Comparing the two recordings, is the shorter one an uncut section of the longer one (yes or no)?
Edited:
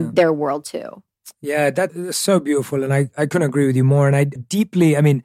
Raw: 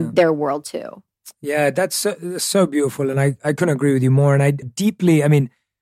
no